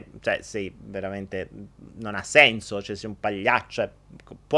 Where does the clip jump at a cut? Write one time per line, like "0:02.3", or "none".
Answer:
none